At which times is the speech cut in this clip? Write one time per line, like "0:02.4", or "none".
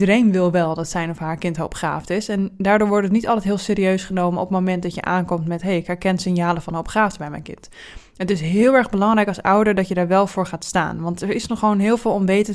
none